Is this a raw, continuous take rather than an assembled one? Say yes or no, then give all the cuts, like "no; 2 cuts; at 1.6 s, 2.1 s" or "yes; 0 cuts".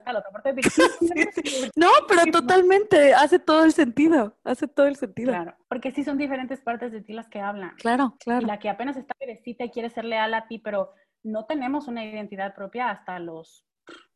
no; 3 cuts; at 1.0 s, 5.6 s, 8.2 s